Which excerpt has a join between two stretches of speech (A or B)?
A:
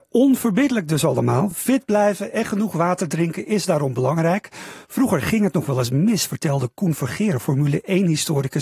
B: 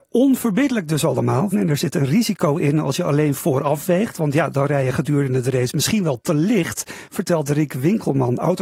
B